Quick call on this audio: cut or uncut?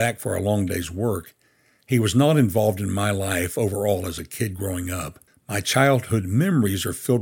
cut